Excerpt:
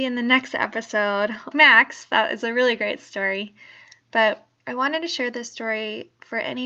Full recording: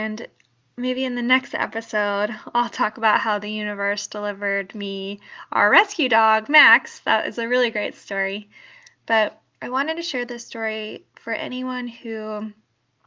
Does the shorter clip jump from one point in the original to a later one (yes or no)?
yes